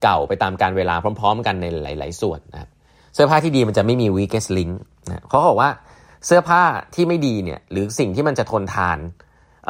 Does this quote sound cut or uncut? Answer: uncut